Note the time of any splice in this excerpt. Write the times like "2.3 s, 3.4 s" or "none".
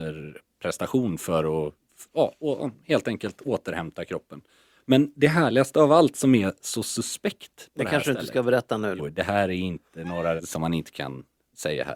9.0 s, 10.4 s